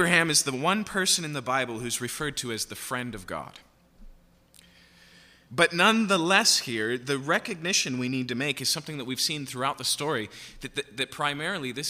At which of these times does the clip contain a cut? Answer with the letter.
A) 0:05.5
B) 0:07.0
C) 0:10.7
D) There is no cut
A